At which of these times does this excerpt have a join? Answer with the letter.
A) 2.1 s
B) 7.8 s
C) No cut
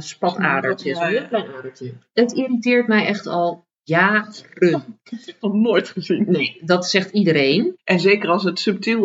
B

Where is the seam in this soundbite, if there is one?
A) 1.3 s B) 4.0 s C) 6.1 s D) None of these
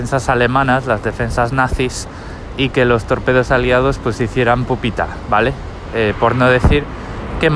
D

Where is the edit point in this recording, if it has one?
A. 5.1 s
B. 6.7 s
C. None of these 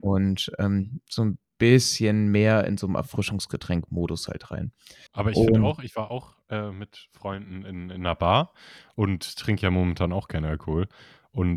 A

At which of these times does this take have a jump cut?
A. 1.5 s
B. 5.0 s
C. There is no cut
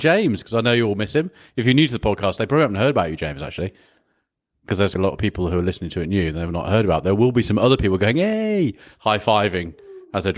B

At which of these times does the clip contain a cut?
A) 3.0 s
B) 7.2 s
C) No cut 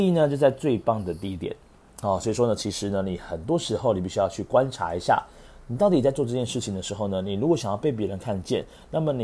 C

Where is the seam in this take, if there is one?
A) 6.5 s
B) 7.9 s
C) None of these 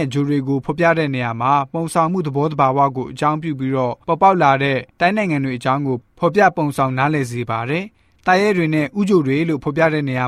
C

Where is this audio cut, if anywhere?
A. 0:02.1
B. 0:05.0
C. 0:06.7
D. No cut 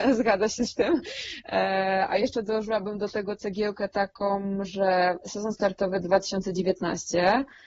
D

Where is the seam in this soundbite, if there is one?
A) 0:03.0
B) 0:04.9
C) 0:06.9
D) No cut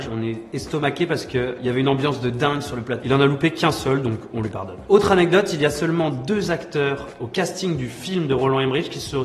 A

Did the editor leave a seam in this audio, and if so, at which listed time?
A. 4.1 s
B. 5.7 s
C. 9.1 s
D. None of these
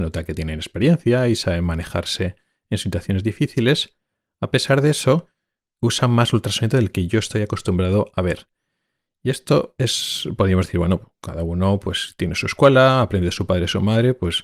B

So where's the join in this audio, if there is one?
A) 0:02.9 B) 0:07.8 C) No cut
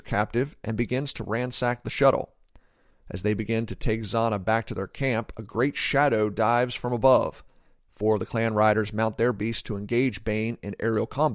B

